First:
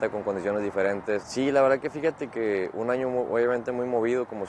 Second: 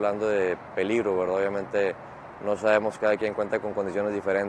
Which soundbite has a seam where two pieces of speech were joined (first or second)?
first